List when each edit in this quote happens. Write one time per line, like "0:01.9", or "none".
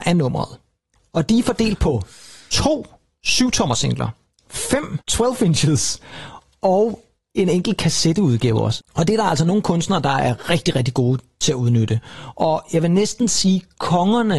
0:05.0
0:08.8